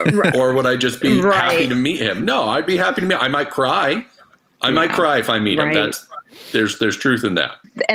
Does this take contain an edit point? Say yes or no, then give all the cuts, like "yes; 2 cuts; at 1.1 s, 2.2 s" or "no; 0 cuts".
no; 0 cuts